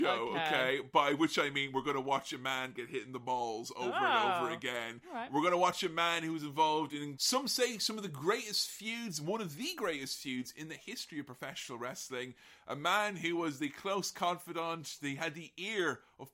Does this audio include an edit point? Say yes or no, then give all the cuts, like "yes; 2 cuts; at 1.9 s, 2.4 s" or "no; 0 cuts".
no; 0 cuts